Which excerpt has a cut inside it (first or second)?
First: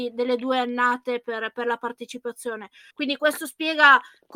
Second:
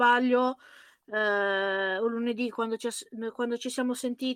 first